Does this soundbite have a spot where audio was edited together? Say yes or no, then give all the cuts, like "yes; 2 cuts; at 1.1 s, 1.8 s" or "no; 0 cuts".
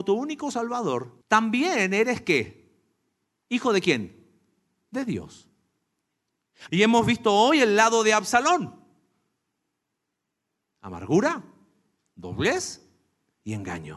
yes; 2 cuts; at 1.2 s, 6.7 s